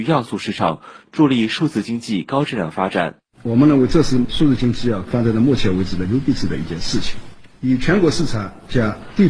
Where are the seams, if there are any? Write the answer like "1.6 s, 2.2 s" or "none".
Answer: none

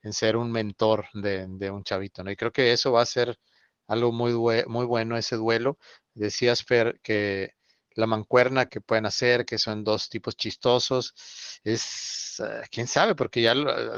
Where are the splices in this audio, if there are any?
8.7 s

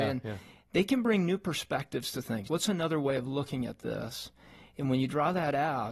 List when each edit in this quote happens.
2.5 s

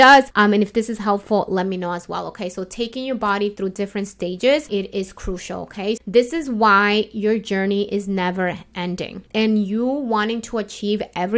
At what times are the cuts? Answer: 6.0 s

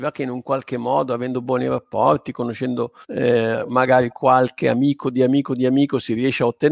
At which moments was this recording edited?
3.0 s

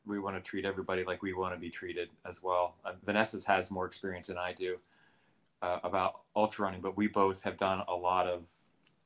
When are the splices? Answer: 3.0 s

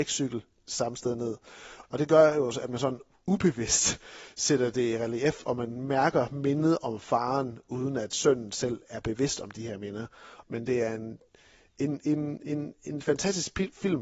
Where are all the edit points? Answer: 1.8 s, 10.4 s

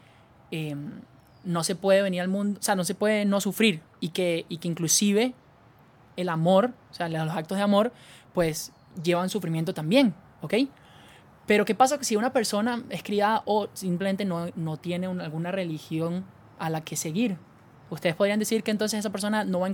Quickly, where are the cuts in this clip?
none

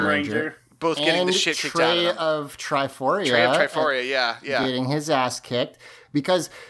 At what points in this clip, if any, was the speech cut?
none

